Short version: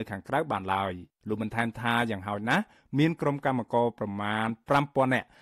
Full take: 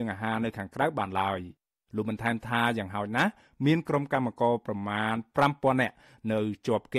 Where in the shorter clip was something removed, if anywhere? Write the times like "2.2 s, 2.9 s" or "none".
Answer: 1.1 s